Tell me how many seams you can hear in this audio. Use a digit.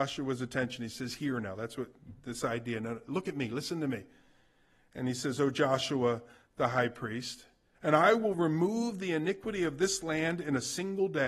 1